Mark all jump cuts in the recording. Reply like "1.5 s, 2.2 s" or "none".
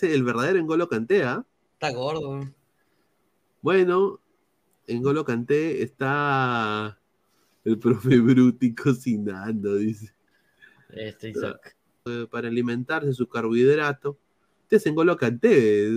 12.1 s